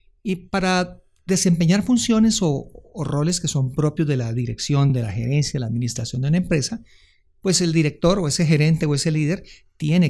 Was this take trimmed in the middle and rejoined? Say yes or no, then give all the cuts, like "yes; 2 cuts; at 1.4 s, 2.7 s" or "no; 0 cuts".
no; 0 cuts